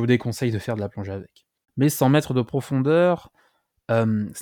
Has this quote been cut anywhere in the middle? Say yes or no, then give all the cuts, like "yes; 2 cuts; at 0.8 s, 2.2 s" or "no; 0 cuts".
yes; 1 cut; at 1.6 s